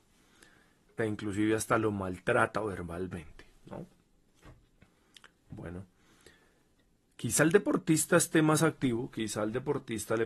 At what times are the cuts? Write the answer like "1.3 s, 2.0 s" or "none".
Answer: 1.0 s